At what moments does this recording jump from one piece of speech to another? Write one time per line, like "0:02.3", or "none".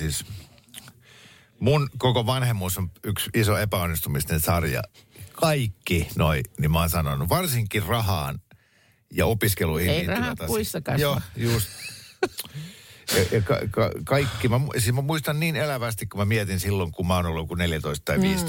none